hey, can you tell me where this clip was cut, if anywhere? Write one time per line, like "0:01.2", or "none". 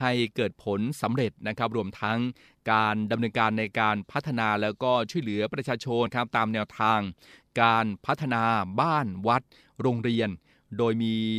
0:06.1